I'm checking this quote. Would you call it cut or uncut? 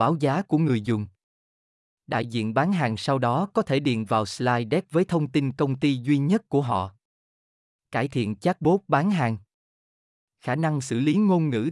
uncut